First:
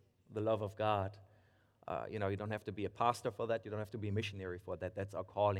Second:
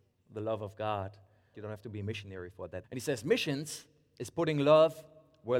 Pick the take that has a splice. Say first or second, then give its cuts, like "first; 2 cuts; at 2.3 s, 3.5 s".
second; 2 cuts; at 1.5 s, 2.8 s